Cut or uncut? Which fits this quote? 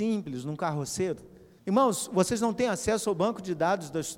cut